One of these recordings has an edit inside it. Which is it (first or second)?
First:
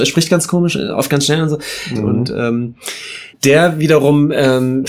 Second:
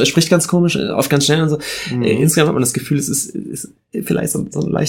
first